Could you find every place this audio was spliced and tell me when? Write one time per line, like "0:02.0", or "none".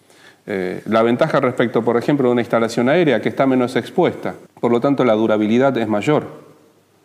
0:04.5